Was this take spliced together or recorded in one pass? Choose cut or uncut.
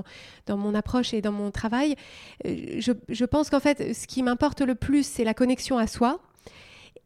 uncut